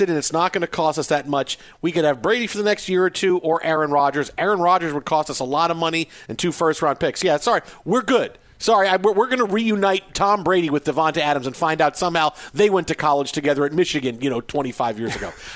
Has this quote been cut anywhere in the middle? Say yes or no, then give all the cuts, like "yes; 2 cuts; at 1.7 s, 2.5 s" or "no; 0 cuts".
no; 0 cuts